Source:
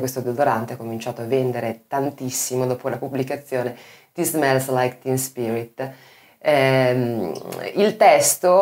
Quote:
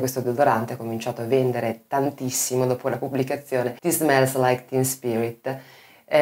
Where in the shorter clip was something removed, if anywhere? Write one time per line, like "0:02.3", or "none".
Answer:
0:03.8